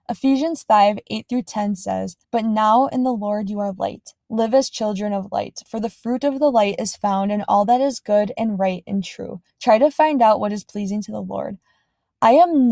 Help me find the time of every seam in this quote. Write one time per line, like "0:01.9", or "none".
0:02.2
0:09.5